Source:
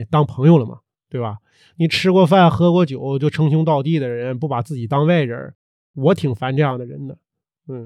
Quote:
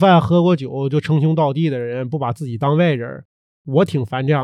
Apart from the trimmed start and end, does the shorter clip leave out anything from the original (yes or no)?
no